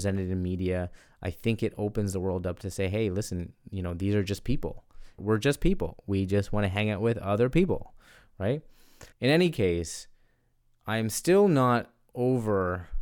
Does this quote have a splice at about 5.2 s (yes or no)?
yes